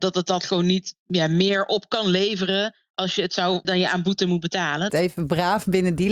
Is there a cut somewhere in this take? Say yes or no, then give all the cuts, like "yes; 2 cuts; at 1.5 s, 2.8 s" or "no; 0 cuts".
yes; 2 cuts; at 3.6 s, 4.9 s